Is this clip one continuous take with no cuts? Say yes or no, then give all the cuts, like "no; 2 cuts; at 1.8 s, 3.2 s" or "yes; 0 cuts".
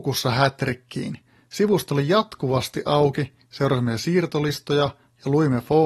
yes; 0 cuts